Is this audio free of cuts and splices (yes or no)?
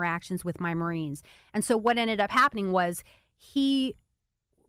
yes